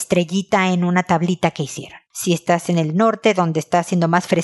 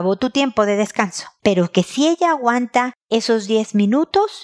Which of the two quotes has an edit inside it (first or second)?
first